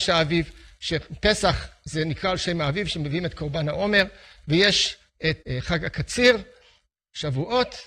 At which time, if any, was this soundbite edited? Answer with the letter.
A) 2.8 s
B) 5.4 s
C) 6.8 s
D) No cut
B